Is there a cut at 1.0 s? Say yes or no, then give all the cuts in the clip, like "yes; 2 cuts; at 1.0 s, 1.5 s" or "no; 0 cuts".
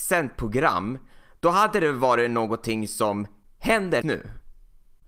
no; 1 cut; at 4.0 s